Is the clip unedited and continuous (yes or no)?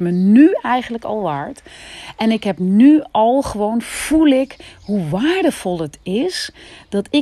yes